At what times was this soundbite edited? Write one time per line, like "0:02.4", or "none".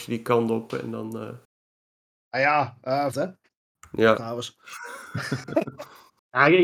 0:03.1
0:04.1